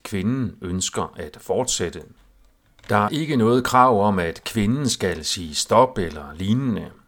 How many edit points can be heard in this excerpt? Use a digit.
1